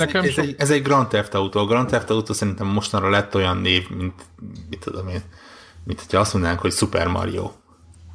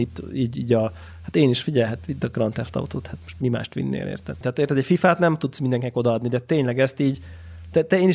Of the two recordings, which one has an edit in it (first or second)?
second